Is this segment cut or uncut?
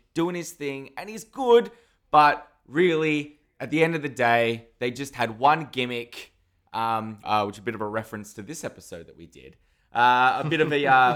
cut